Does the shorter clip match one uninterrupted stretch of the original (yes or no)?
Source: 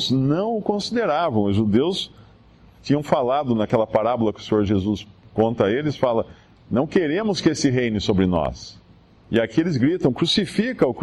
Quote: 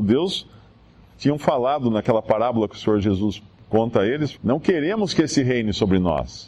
no